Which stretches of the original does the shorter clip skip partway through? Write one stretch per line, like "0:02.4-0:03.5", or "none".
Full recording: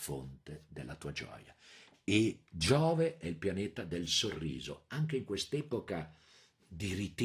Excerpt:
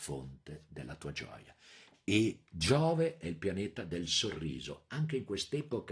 none